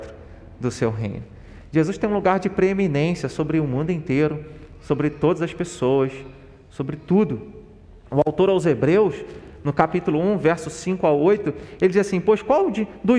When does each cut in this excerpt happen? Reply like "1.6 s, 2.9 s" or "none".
8.1 s

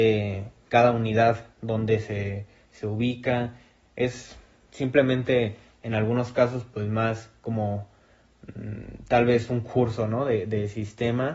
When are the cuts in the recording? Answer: none

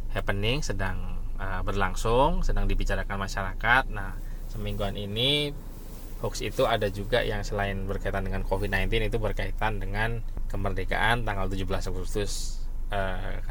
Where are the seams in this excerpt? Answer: none

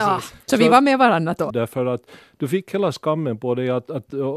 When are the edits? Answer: 1.5 s

